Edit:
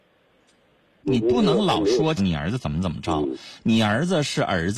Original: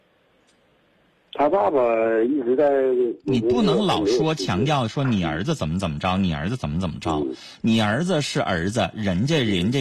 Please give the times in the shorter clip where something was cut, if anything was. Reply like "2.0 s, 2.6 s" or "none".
1.0 s, 2.2 s